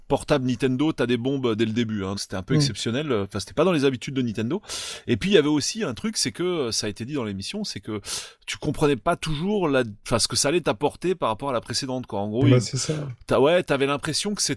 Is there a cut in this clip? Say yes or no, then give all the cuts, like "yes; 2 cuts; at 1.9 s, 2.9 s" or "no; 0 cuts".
yes; 1 cut; at 2.1 s